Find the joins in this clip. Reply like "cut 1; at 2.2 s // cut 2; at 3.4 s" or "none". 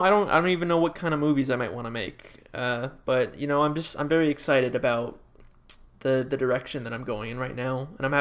none